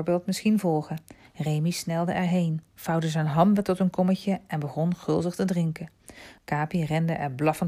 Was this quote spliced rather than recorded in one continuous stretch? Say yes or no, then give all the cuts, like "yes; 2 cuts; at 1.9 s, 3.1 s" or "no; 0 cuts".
yes; 2 cuts; at 1.3 s, 6.4 s